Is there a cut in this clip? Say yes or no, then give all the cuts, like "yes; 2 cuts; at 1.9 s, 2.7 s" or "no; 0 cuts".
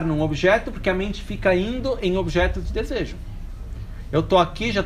no; 0 cuts